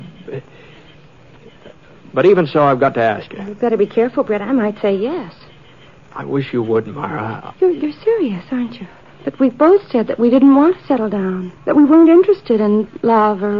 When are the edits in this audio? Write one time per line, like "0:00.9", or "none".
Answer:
0:07.5
0:09.1
0:11.6